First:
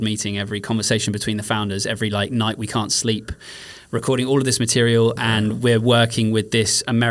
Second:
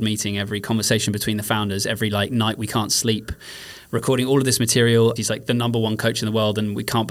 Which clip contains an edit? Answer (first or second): second